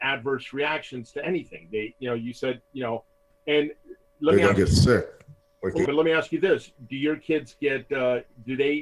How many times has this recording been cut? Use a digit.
1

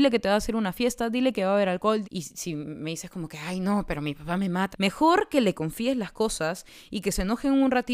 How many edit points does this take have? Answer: 2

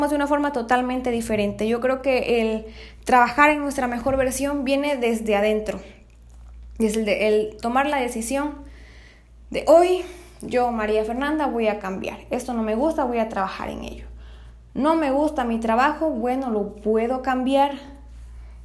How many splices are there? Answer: 0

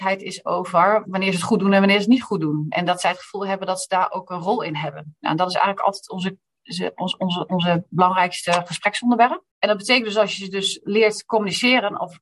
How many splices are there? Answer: 1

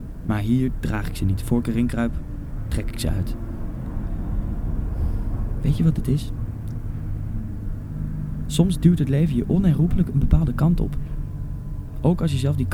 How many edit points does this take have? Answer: 0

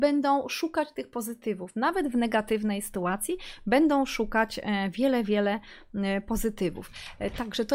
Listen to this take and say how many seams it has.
0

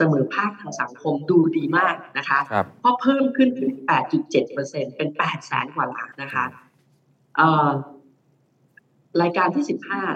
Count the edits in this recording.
1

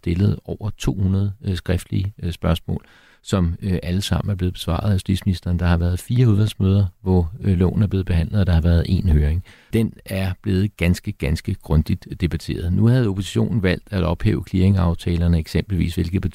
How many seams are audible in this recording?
1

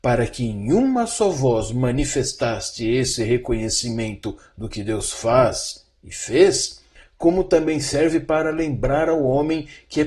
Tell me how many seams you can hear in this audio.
0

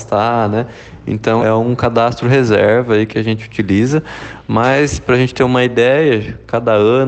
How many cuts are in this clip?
1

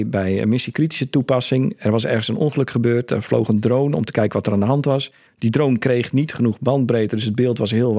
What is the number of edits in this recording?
0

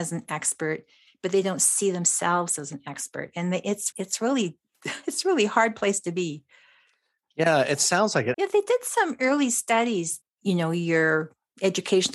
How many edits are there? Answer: 3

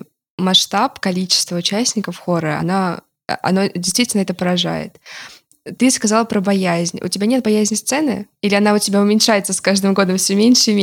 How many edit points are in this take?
0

